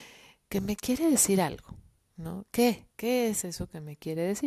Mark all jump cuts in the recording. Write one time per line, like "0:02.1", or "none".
0:02.9

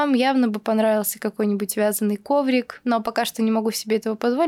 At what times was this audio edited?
none

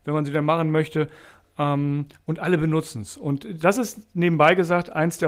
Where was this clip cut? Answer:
none

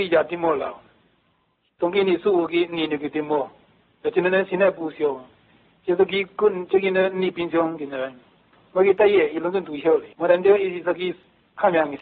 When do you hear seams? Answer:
0:10.1

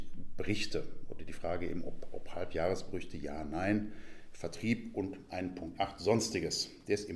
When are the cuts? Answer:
none

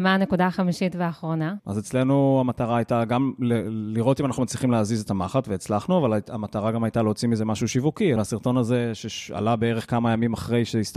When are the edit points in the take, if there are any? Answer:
0:01.6
0:08.2

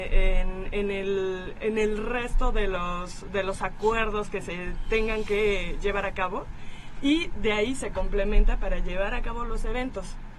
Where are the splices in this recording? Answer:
none

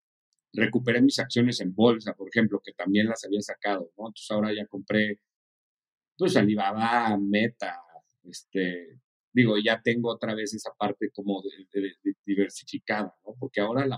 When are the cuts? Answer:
none

